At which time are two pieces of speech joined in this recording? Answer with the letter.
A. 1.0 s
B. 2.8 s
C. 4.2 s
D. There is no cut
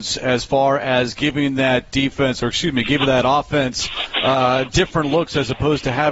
D